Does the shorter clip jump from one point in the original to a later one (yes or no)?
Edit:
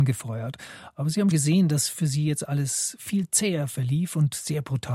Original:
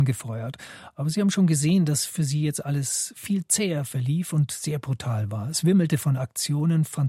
yes